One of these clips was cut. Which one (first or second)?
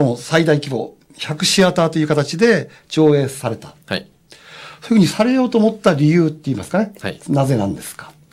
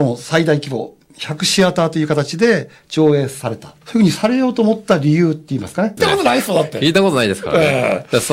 second